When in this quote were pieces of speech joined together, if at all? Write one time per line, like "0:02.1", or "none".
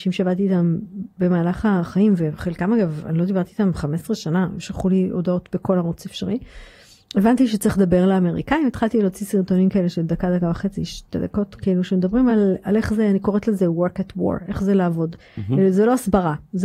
none